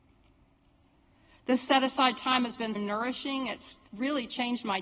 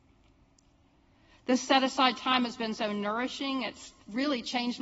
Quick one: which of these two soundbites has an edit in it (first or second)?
first